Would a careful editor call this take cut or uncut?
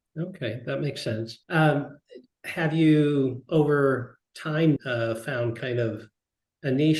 cut